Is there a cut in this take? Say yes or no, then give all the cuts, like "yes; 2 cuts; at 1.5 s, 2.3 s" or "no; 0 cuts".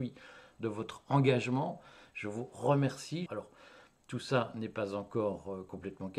yes; 1 cut; at 3.3 s